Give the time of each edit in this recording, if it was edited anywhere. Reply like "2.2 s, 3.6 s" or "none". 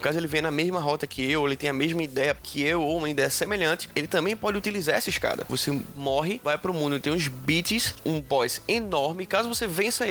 5.5 s, 8.0 s